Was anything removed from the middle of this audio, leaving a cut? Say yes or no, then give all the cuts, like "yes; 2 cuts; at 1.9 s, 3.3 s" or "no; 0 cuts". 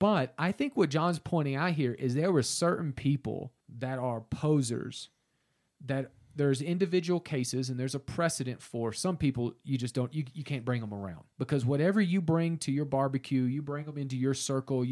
yes; 2 cuts; at 3.6 s, 11.3 s